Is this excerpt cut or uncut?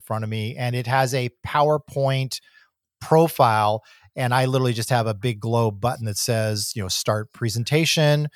uncut